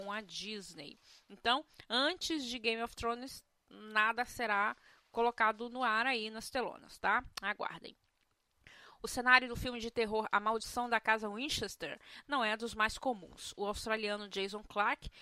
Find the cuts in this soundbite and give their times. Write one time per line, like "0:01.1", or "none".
none